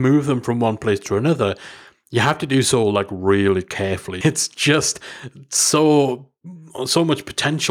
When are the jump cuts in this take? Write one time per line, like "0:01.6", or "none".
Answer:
0:04.2